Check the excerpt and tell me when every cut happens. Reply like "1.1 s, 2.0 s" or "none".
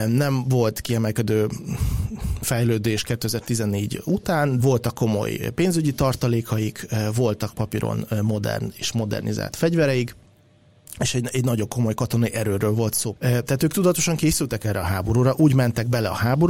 4.6 s, 13.1 s